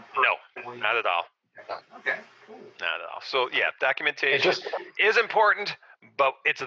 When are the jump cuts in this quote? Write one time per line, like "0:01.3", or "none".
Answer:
none